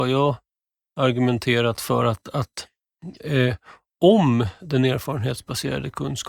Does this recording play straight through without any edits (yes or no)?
yes